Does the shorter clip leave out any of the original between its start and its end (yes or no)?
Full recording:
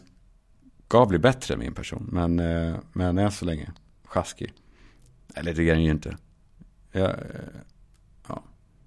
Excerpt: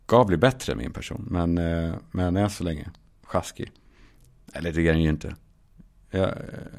no